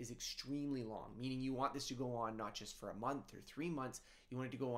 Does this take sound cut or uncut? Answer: uncut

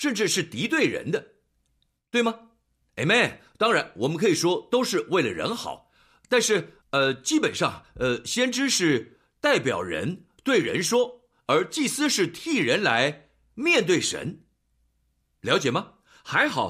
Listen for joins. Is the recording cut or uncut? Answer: cut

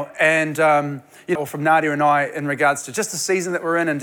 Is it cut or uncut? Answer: cut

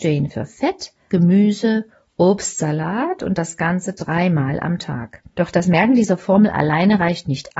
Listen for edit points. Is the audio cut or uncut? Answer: cut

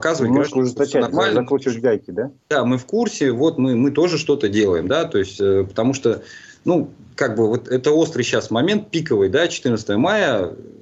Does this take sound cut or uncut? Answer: uncut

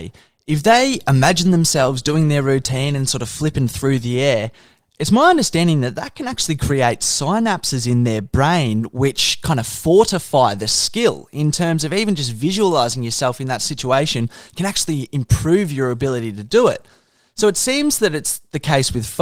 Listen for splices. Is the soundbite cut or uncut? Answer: uncut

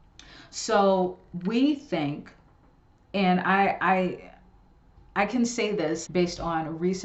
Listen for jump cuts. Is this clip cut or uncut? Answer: cut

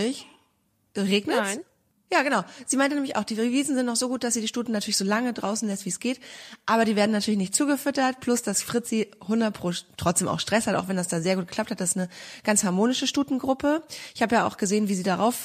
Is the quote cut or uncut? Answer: uncut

